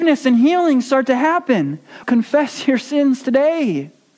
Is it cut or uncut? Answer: cut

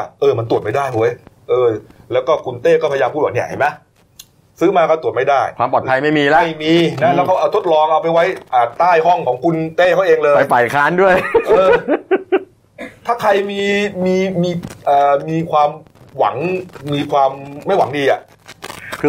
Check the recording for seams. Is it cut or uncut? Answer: uncut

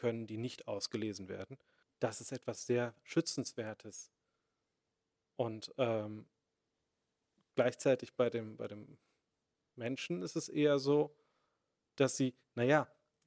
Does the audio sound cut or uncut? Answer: cut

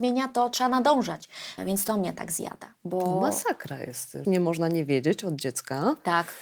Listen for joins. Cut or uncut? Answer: cut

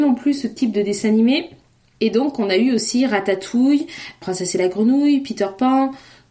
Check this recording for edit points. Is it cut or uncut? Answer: uncut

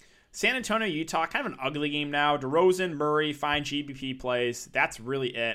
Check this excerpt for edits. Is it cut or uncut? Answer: uncut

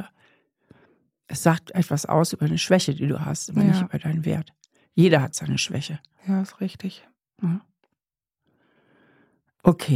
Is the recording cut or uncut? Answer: uncut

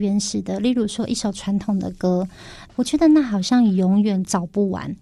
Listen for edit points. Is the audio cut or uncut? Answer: cut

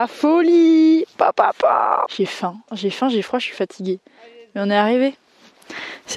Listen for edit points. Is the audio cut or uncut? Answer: cut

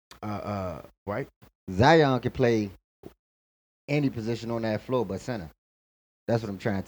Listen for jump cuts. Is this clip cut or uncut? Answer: cut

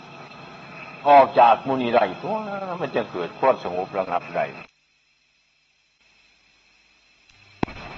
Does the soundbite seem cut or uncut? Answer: cut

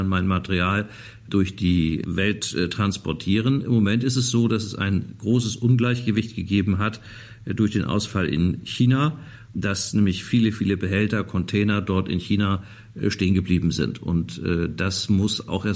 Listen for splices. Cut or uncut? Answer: cut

